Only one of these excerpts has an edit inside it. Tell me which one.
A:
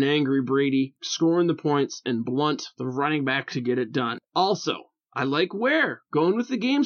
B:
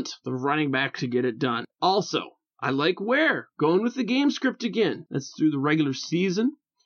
B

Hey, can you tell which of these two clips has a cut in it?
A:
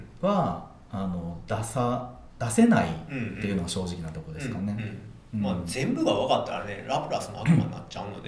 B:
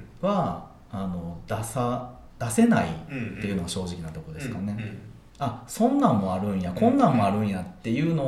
B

